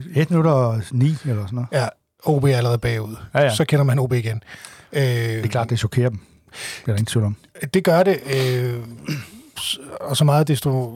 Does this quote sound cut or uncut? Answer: uncut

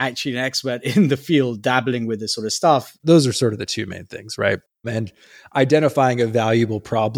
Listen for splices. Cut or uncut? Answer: cut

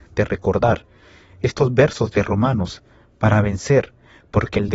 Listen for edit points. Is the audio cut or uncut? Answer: uncut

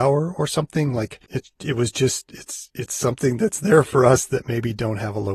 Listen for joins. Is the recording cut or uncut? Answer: cut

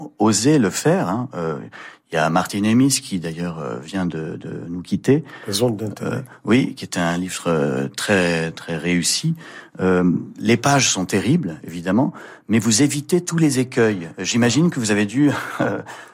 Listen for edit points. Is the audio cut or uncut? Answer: uncut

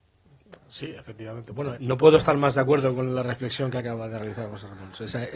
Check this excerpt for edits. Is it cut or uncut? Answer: cut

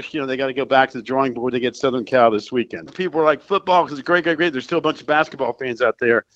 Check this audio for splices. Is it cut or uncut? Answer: cut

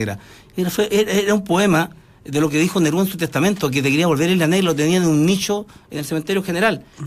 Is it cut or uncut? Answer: uncut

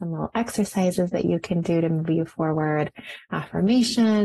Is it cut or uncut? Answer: uncut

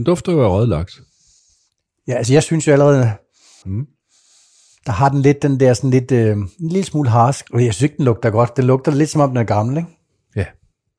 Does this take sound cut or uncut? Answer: cut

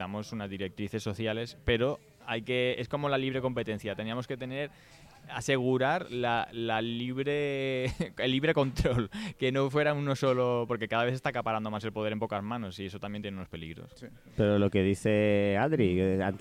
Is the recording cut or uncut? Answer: uncut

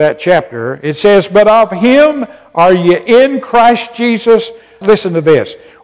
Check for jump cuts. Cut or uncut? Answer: cut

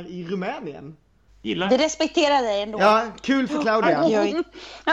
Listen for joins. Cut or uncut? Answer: cut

